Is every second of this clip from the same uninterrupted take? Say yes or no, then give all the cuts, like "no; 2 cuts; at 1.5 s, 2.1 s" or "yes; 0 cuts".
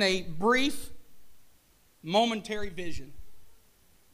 yes; 0 cuts